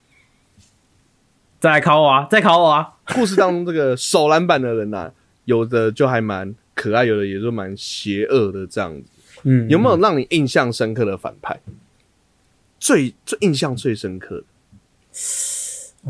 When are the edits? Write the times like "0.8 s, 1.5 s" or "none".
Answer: none

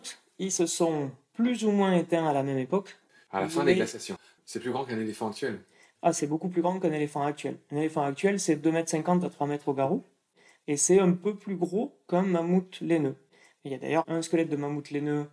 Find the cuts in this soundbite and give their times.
4.2 s

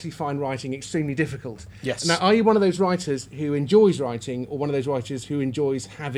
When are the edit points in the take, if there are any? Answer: none

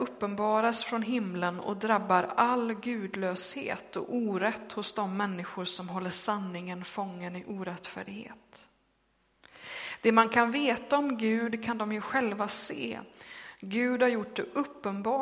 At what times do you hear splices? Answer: none

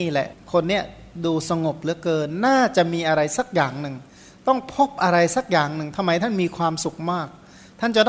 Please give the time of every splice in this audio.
none

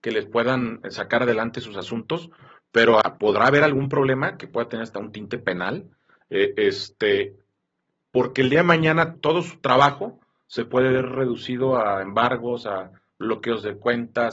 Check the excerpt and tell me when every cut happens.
3.0 s, 6.2 s, 9.1 s

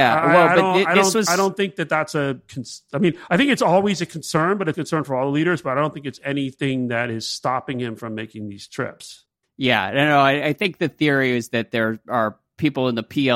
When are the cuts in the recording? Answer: 4.7 s, 9.4 s

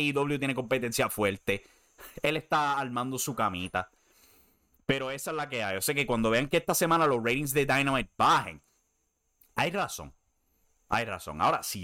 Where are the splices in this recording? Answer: none

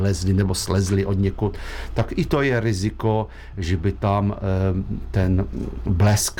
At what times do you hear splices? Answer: none

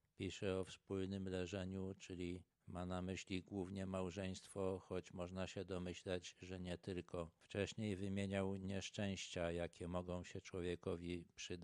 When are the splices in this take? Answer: none

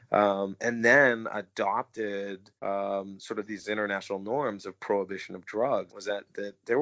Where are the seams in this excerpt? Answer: 2.6 s, 5.9 s

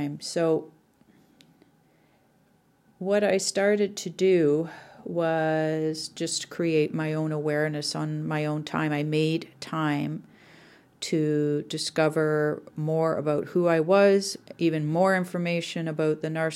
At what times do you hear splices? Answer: none

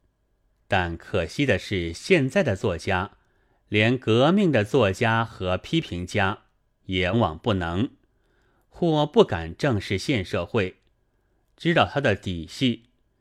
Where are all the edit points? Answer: 7.1 s

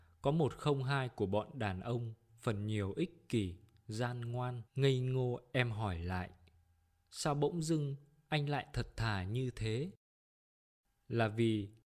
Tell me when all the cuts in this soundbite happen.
4.7 s

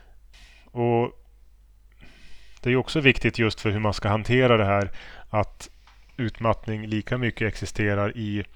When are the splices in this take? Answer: none

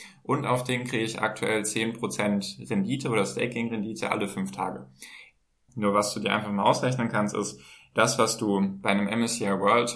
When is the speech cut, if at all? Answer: 5.7 s

